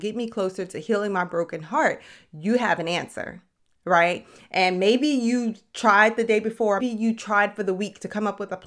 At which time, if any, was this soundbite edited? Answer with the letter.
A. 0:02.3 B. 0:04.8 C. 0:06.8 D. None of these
C